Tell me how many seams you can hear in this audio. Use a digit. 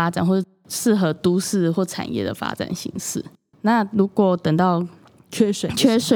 1